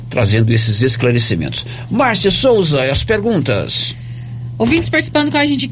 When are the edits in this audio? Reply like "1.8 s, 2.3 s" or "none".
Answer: none